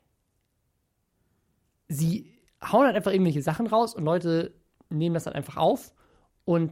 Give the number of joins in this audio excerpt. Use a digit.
0